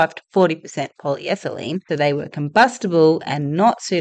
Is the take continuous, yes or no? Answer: no